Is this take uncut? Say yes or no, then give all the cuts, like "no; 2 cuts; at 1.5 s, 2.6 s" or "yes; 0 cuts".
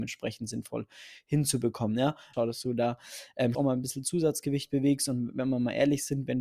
no; 2 cuts; at 2.3 s, 3.5 s